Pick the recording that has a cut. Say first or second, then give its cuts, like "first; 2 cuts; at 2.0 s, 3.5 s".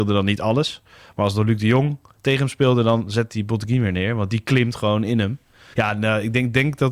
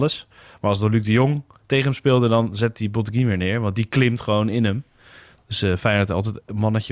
first; 1 cut; at 5.7 s